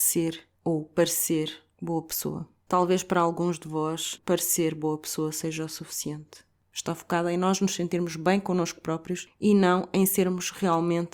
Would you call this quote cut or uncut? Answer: cut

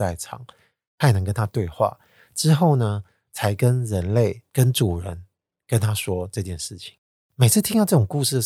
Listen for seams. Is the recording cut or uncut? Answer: uncut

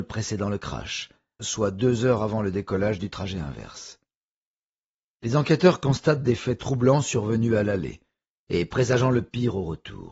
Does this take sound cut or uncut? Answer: cut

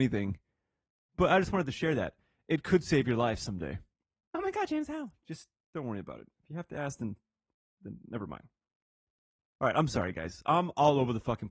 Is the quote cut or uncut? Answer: uncut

